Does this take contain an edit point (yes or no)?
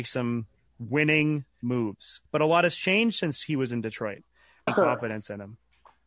yes